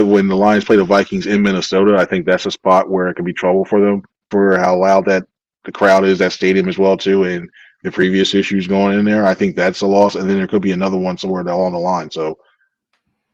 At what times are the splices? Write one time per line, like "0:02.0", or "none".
0:04.3